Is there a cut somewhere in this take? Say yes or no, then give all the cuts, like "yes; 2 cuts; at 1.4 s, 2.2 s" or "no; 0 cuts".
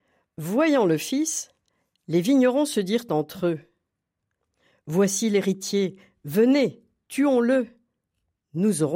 no; 0 cuts